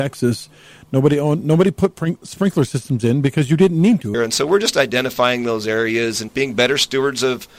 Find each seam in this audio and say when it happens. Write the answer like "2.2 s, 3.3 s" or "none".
4.1 s, 6.3 s